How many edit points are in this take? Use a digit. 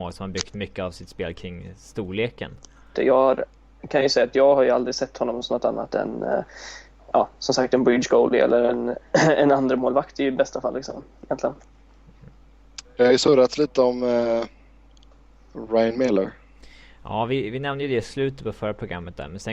1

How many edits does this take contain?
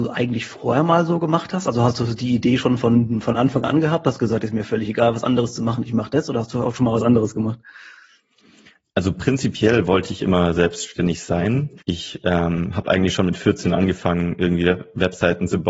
1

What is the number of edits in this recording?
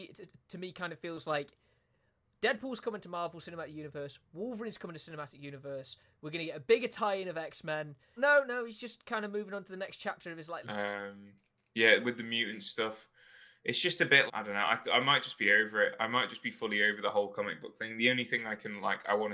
3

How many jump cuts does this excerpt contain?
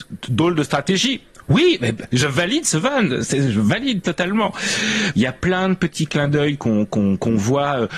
2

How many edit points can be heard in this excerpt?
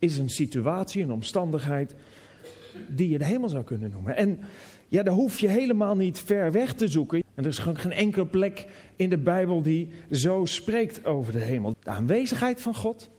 2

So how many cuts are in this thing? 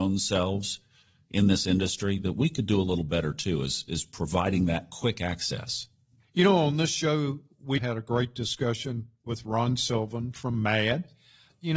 2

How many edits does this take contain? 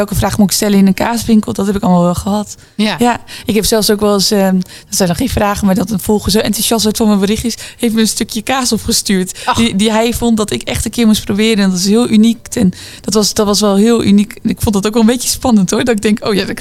1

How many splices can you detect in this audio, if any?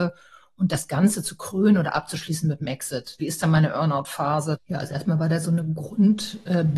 2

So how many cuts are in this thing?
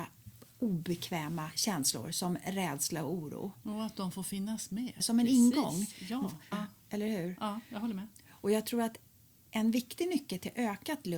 2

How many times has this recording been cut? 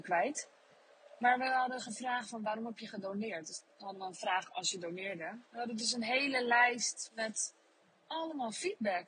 1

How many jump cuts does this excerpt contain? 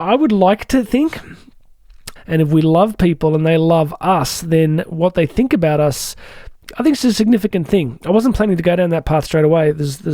1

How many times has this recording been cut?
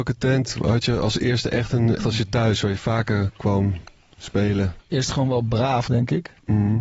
3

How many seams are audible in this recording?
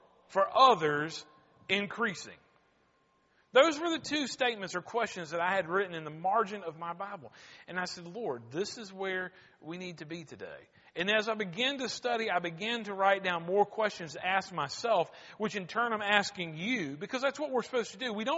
0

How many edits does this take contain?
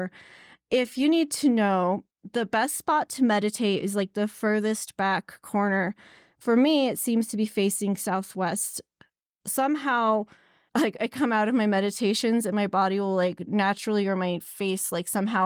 1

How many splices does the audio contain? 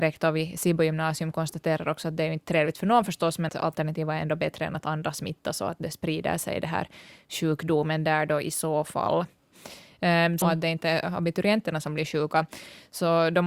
2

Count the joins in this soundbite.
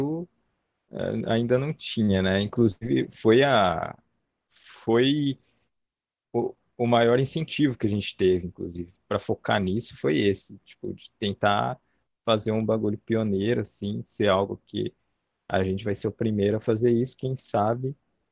1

